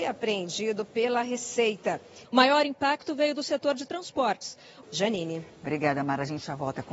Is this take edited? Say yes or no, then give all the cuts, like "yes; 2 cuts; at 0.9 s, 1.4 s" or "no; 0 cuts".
yes; 2 cuts; at 2.2 s, 4.8 s